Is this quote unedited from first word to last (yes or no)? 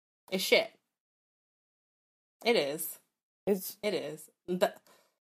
yes